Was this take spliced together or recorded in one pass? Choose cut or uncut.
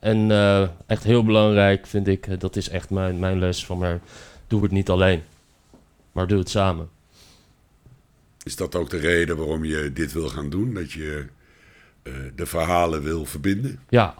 uncut